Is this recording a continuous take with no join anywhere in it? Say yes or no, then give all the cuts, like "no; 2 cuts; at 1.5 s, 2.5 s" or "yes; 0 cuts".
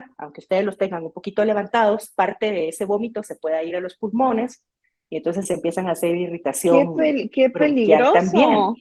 yes; 0 cuts